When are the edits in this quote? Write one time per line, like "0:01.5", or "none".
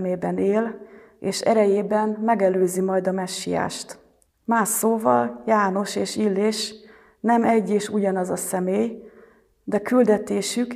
0:04.3